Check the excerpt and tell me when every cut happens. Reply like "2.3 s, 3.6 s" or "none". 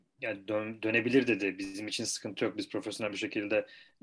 none

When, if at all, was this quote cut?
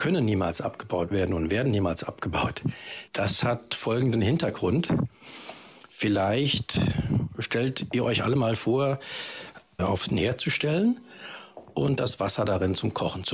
3.1 s, 9.8 s

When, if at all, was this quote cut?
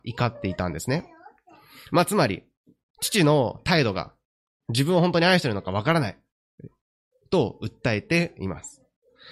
none

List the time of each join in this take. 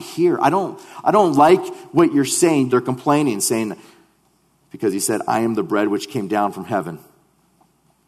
2.7 s

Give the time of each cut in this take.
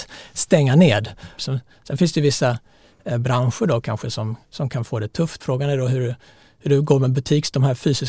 1.4 s, 5.4 s

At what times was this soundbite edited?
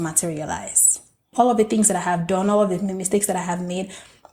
1.3 s

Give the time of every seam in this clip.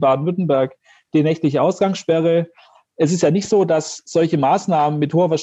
none

